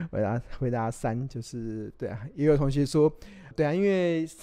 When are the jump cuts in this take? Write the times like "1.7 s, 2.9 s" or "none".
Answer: 3.5 s